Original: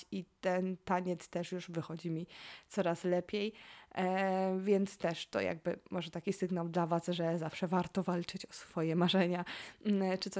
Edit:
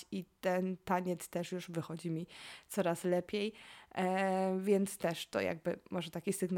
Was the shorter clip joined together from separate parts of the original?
no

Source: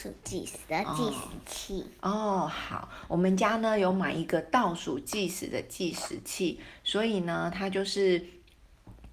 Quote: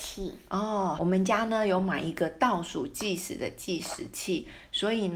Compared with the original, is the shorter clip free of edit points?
no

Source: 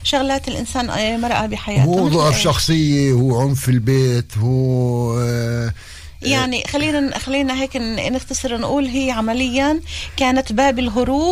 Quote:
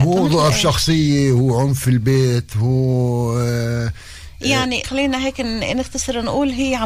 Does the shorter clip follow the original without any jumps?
no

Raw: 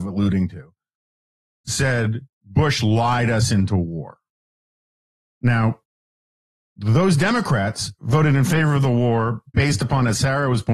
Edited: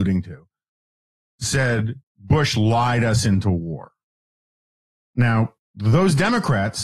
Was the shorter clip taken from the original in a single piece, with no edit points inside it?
no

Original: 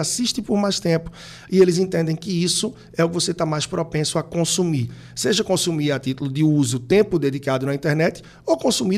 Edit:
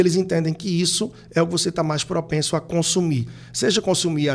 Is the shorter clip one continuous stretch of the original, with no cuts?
yes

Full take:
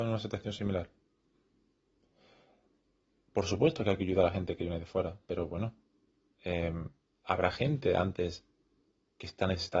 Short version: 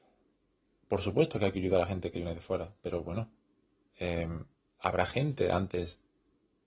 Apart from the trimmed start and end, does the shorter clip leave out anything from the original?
no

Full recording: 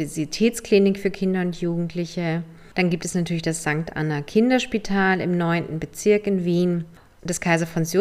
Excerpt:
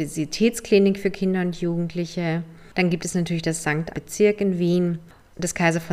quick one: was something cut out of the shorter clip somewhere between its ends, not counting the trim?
yes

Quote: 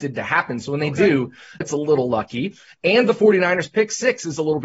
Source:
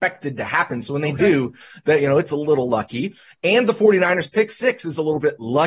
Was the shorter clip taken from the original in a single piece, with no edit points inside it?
no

